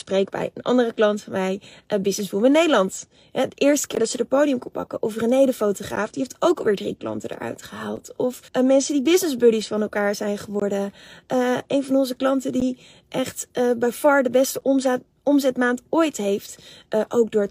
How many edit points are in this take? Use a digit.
1